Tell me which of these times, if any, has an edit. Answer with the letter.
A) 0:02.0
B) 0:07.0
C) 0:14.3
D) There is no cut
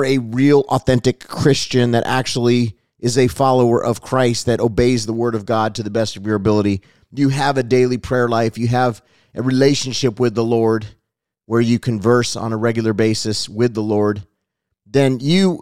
D